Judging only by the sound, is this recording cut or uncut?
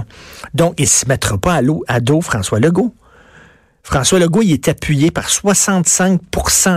uncut